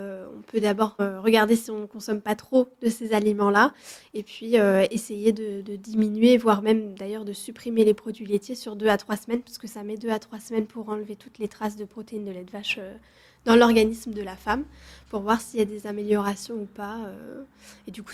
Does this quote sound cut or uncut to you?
cut